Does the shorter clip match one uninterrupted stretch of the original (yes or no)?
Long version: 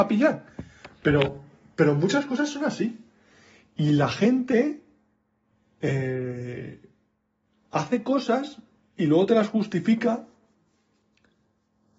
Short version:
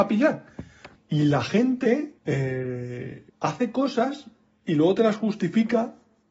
no